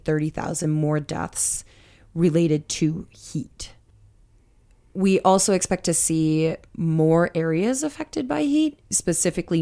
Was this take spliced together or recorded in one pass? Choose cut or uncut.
uncut